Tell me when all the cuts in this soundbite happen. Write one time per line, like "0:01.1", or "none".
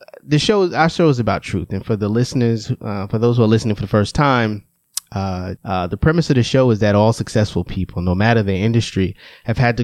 0:05.6